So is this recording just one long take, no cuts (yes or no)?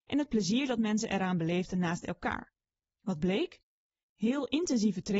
no